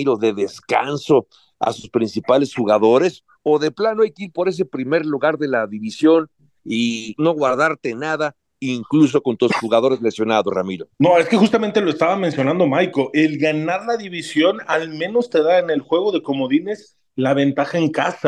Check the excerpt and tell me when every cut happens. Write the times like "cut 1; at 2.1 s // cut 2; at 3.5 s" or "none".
cut 1; at 7.2 s // cut 2; at 10.9 s